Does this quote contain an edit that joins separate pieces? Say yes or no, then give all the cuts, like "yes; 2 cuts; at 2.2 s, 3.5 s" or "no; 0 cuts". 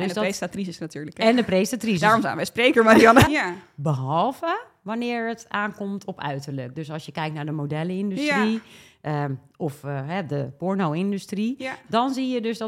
yes; 1 cut; at 3.3 s